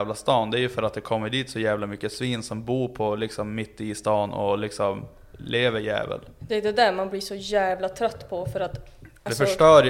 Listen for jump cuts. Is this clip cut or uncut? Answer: uncut